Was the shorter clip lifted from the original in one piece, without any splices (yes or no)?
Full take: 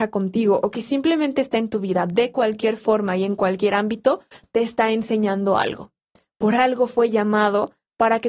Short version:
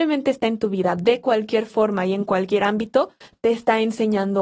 yes